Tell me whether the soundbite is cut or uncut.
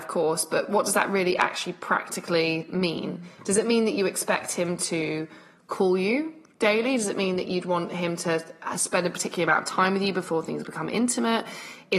uncut